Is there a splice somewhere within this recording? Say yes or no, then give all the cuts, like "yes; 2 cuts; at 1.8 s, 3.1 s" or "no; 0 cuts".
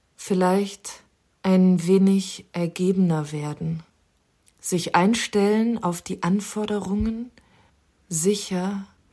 no; 0 cuts